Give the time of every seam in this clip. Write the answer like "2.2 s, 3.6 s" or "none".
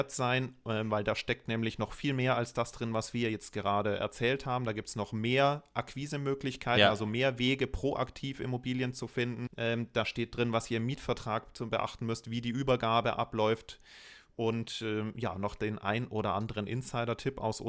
9.5 s